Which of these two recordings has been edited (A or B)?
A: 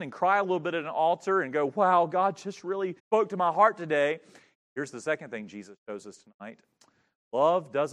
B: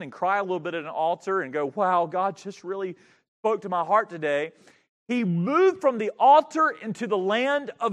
A